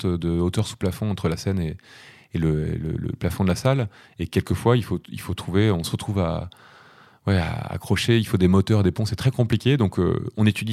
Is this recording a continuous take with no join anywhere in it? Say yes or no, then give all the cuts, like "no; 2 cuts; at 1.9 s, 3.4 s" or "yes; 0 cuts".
yes; 0 cuts